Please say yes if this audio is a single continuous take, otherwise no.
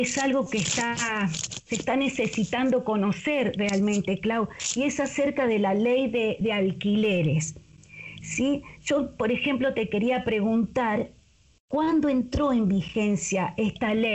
yes